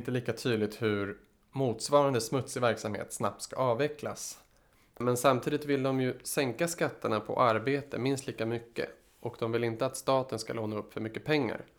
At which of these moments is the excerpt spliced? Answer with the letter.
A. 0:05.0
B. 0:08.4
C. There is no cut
A